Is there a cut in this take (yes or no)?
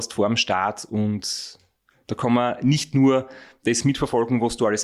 no